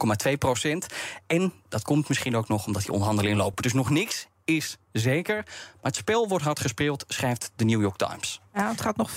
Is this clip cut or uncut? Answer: uncut